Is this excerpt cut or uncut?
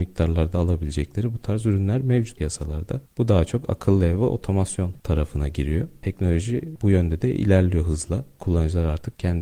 uncut